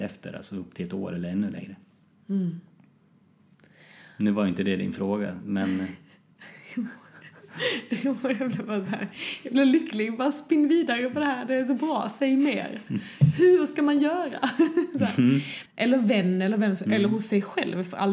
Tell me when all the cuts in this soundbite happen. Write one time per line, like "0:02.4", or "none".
0:15.7